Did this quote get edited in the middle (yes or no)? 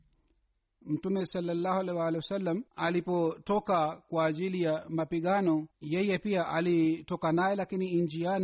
yes